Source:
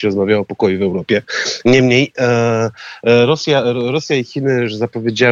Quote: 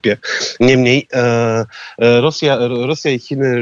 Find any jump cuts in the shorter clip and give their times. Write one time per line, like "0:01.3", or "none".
none